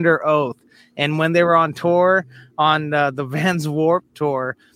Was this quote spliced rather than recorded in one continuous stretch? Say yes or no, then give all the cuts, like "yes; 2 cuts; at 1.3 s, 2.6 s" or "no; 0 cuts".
no; 0 cuts